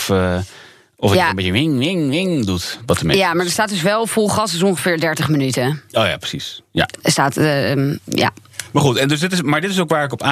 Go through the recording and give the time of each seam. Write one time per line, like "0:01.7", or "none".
none